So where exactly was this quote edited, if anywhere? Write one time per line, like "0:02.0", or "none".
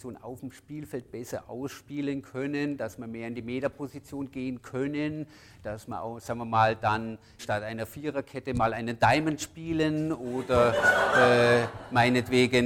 0:07.4